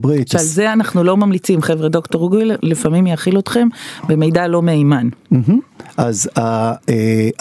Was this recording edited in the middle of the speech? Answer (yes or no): no